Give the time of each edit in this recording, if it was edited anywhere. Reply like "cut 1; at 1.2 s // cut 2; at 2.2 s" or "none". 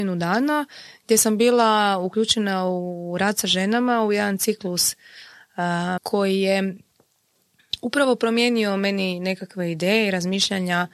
cut 1; at 6.0 s